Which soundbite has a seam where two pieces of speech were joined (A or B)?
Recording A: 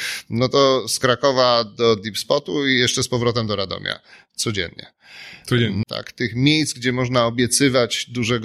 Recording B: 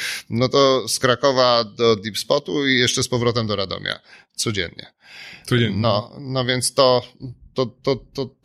A